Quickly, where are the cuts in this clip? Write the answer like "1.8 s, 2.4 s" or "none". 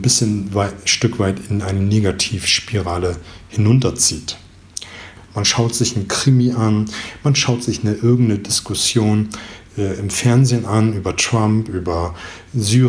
5.2 s